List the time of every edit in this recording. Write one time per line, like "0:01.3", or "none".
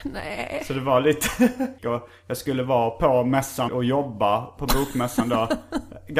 0:01.8
0:03.7